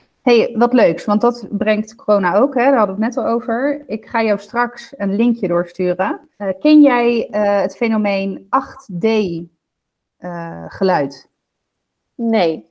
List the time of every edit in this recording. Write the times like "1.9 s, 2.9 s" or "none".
6.3 s

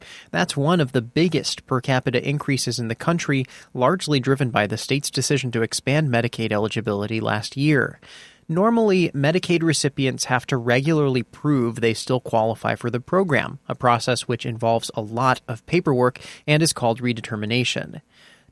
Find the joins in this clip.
none

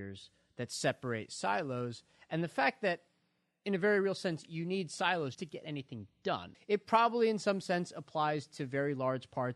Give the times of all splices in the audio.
5.3 s, 6.5 s

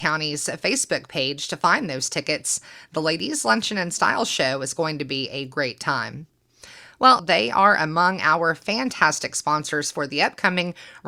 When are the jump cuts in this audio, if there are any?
7.2 s

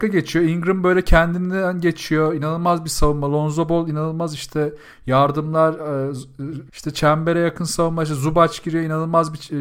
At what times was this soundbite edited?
6.7 s

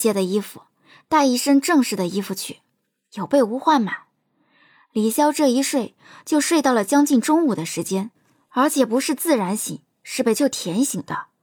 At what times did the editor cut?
10.4 s

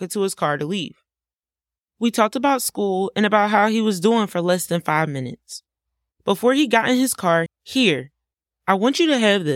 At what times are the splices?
7.5 s

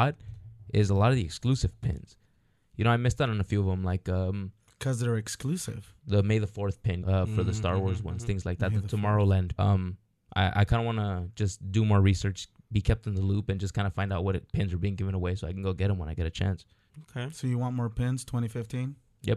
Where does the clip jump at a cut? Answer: 7.0 s, 9.6 s

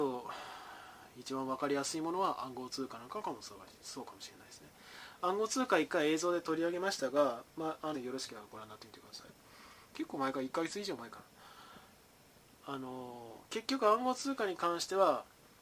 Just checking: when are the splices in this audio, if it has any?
7.9 s

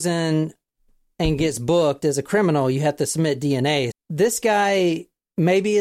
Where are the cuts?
3.9 s

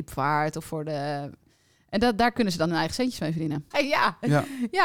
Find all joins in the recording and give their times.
3.7 s

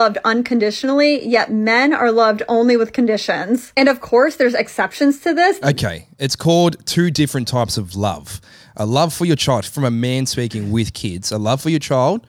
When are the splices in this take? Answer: 5.6 s

